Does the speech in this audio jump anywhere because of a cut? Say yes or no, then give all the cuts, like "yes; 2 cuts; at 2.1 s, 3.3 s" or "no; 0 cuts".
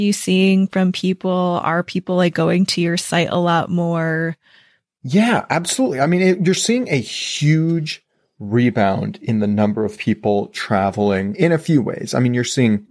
no; 0 cuts